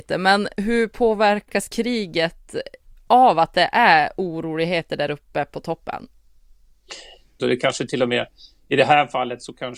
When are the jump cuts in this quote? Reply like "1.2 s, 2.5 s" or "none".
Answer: 7.4 s